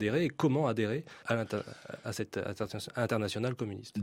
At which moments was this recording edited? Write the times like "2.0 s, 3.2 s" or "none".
1.2 s

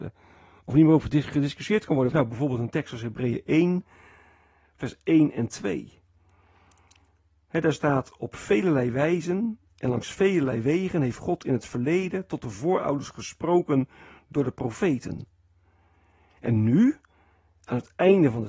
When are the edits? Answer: 2.1 s

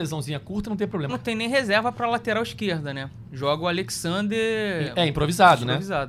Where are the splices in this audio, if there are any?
1.1 s

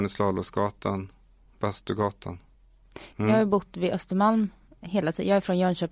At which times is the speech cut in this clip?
3.1 s

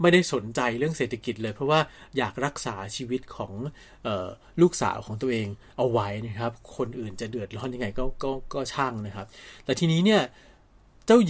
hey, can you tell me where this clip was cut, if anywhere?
none

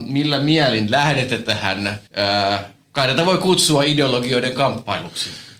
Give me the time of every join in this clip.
2.1 s

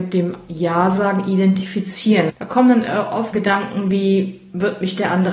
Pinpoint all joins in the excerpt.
2.3 s, 3.3 s

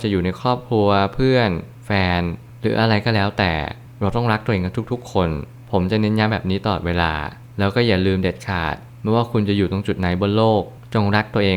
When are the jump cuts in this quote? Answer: none

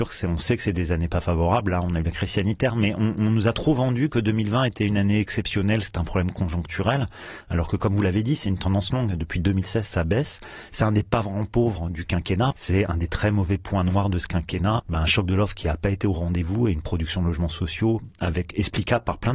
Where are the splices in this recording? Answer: 12.5 s, 14.8 s

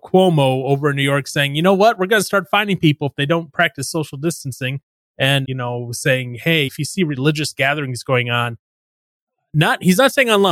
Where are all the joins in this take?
5.4 s, 6.7 s

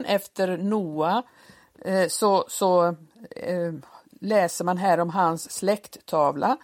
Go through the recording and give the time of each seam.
none

